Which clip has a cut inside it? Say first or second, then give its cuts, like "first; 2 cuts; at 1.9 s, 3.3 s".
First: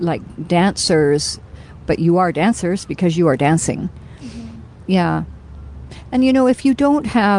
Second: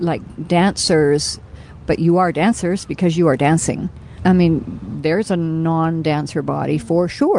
second; 1 cut; at 4.2 s